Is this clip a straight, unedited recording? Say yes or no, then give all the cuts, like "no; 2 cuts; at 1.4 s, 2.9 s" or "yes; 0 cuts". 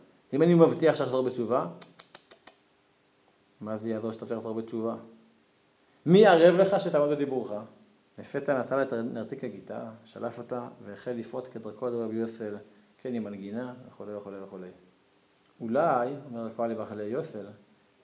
no; 2 cuts; at 8.1 s, 15.4 s